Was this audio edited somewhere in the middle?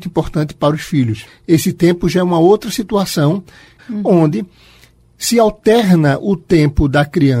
yes; 2 cuts; at 1.3 s, 3.8 s

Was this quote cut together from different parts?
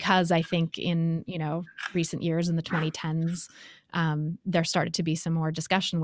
no; 0 cuts

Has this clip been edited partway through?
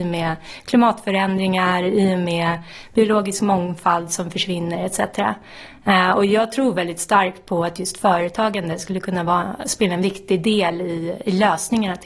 no; 0 cuts

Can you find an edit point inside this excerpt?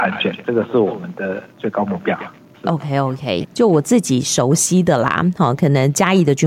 yes; 1 cut; at 3.4 s

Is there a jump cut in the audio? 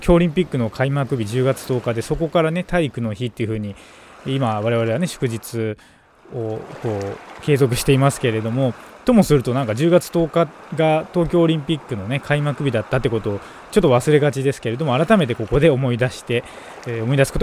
no; 0 cuts

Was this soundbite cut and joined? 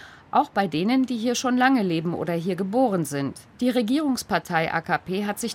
yes; 1 cut; at 3.5 s

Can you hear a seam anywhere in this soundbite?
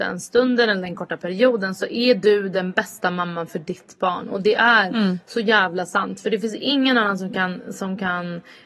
no; 0 cuts

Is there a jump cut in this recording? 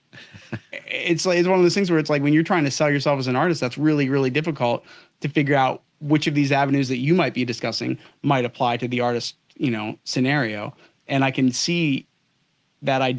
no; 0 cuts

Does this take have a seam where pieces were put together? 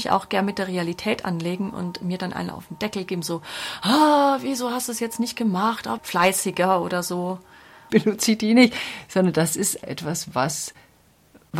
yes; 3 cuts; at 6.0 s, 7.9 s, 9.8 s

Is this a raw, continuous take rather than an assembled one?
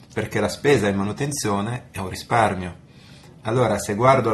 yes; 0 cuts

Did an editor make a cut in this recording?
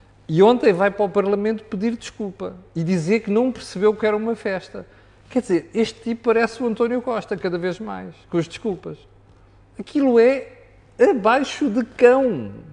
no; 0 cuts

